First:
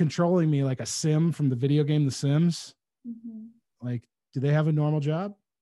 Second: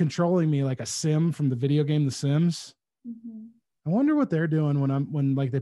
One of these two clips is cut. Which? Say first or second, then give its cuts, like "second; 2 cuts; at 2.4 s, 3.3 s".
first; 1 cut; at 3.8 s